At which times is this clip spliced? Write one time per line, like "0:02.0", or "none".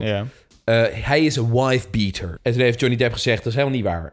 0:02.4